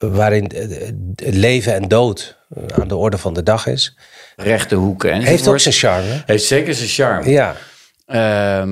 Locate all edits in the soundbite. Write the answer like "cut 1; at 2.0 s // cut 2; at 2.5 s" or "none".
cut 1; at 4.4 s

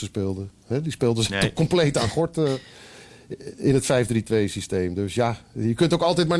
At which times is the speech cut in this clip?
none

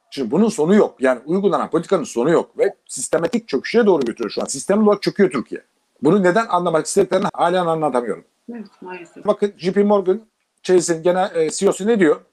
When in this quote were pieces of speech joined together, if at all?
cut 1; at 7.3 s // cut 2; at 9.3 s

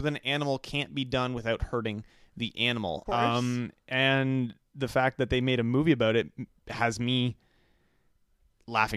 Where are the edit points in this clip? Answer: cut 1; at 3.1 s

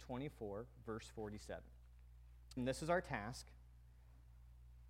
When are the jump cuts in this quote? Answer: cut 1; at 2.6 s

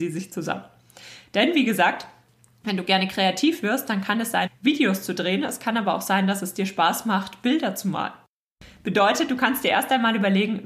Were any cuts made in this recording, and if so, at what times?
cut 1; at 4.5 s

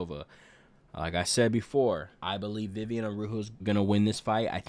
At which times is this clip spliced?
cut 1; at 2.2 s // cut 2; at 3.6 s

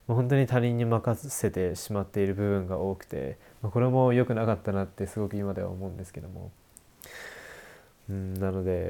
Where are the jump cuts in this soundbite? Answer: none

